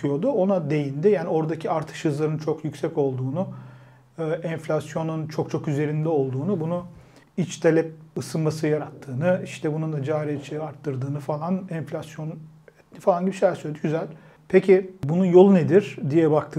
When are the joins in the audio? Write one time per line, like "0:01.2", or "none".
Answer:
none